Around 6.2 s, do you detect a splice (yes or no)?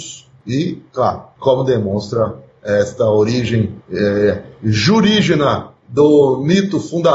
no